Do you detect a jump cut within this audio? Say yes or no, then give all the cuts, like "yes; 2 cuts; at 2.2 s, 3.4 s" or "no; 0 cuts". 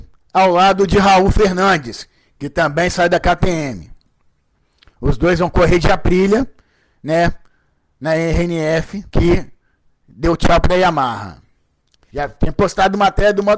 yes; 2 cuts; at 9.1 s, 12.1 s